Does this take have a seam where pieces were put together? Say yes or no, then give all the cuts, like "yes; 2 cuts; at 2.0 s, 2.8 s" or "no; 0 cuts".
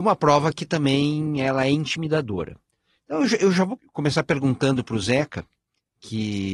yes; 1 cut; at 3.8 s